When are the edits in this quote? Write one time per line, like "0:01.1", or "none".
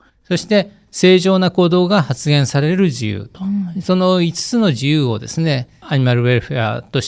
0:05.8